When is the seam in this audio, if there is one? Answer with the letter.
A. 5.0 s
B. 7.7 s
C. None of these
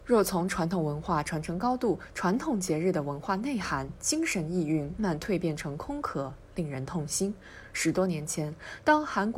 A